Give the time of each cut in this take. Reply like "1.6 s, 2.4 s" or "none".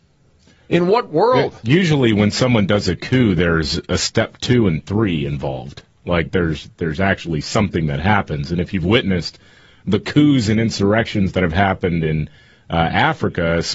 none